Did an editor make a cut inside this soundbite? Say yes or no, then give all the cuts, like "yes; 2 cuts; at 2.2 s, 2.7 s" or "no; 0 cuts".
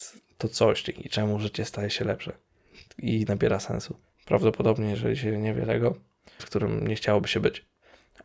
yes; 2 cuts; at 4.1 s, 6.4 s